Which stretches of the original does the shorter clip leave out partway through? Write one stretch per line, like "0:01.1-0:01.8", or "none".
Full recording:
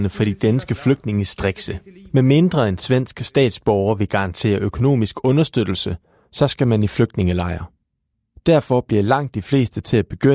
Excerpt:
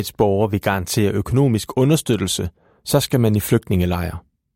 none